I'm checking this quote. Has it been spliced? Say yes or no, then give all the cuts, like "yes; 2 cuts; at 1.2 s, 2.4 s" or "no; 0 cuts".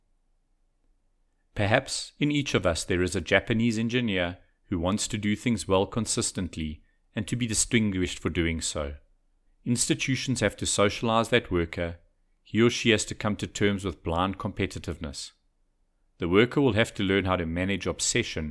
yes; 1 cut; at 9.5 s